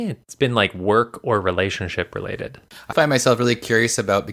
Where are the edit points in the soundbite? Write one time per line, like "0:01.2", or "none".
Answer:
0:02.9